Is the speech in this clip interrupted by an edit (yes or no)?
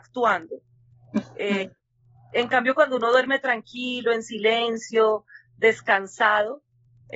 no